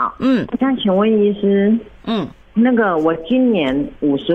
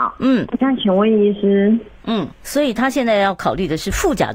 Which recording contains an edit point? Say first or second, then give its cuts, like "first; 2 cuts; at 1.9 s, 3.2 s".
second; 1 cut; at 2.4 s